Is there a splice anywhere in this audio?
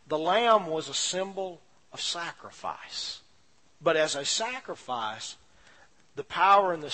yes; 1 cut; at 3.6 s

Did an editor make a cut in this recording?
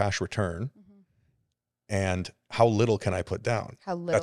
no; 0 cuts

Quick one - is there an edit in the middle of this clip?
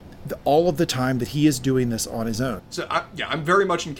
yes; 1 cut; at 2.6 s

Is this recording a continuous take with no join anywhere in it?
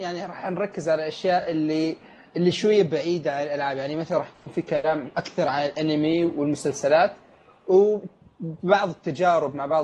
yes; 0 cuts

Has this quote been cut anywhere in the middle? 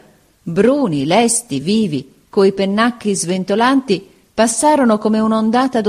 no; 0 cuts

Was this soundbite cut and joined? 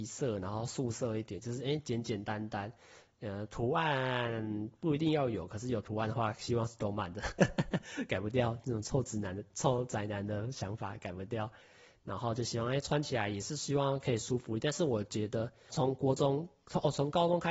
yes; 2 cuts; at 1.4 s, 15.7 s

